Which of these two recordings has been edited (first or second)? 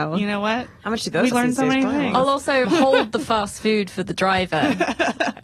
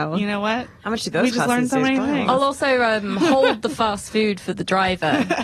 first